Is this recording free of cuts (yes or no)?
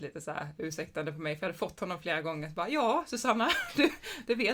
yes